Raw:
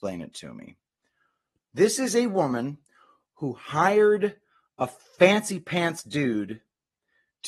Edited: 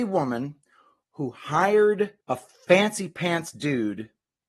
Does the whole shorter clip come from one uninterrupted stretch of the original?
no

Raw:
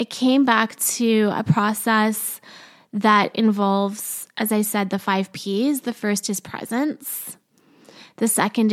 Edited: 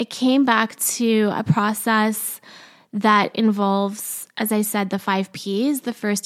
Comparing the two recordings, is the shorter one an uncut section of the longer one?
yes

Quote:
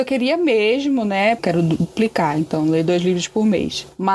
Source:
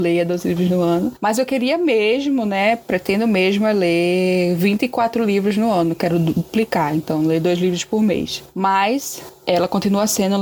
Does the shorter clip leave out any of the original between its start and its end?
yes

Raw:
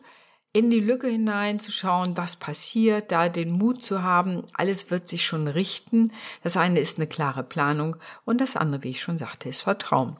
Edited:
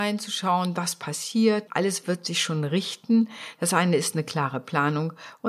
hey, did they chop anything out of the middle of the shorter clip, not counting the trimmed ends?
yes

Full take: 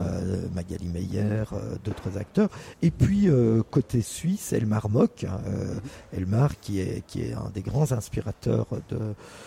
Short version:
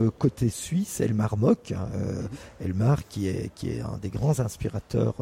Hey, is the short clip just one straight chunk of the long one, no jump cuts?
yes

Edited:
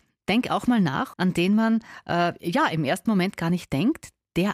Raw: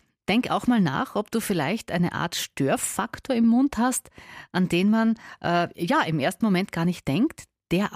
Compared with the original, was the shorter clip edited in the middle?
yes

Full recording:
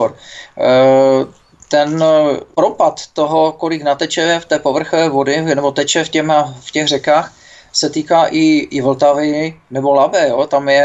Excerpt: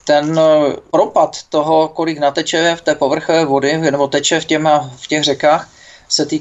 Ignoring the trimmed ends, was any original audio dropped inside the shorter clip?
no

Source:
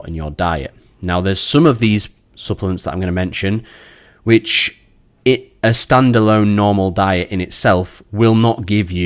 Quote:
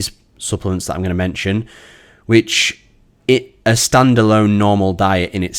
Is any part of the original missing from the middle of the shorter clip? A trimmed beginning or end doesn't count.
no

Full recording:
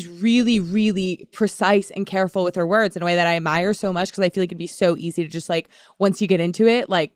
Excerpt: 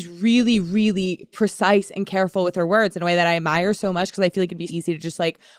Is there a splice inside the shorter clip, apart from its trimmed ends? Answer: yes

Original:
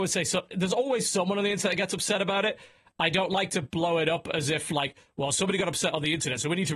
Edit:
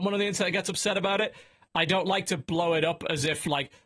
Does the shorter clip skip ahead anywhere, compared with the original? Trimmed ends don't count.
no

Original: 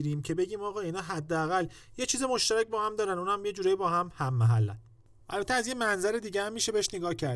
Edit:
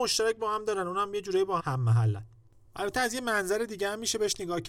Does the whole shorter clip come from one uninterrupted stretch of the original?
no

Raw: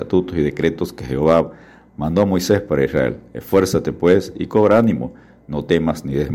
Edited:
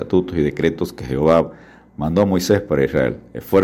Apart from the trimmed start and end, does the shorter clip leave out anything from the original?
no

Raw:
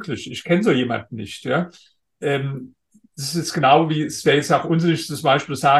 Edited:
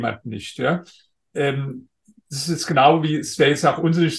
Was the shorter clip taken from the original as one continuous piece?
yes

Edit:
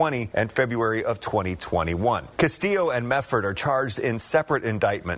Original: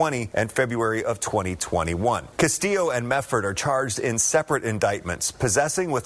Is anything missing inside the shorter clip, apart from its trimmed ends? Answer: no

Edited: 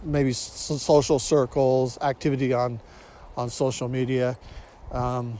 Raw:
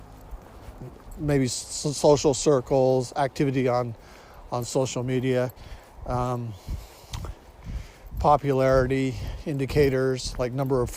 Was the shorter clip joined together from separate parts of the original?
no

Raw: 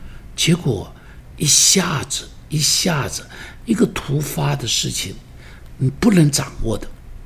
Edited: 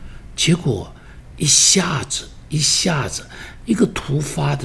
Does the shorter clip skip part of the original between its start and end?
no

